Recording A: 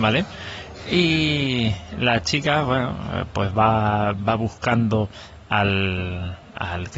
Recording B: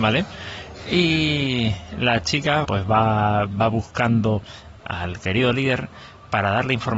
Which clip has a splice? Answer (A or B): B